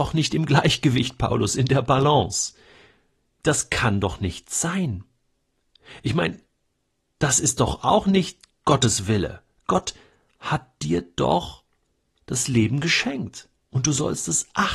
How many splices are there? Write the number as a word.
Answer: one